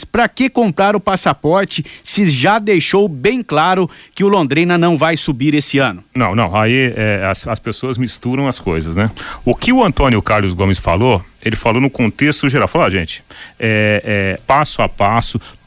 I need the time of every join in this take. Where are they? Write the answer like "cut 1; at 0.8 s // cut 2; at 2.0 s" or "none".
cut 1; at 14.4 s

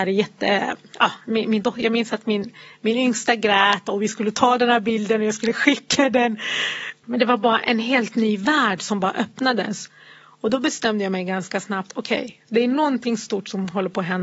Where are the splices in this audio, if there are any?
cut 1; at 7.0 s

